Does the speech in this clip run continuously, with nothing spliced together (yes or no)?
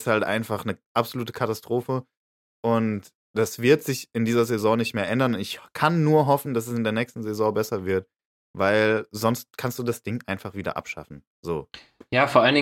yes